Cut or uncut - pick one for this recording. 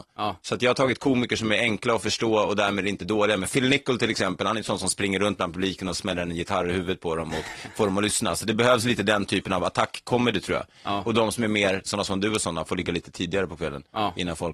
cut